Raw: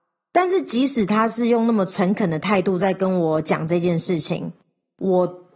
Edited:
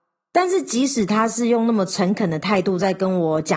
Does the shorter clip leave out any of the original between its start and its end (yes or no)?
no